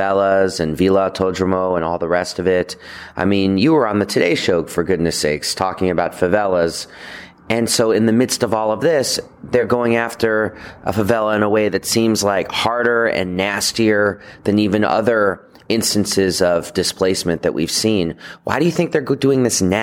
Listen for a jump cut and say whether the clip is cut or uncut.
uncut